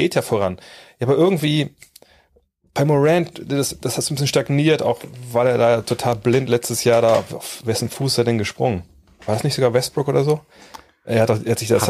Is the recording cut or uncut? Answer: uncut